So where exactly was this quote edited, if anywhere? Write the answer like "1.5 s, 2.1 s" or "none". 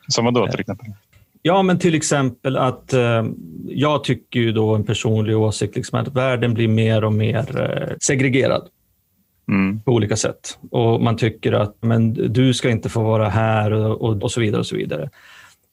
7.9 s, 11.8 s, 14.2 s